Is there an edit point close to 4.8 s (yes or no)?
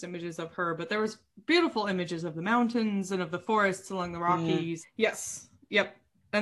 yes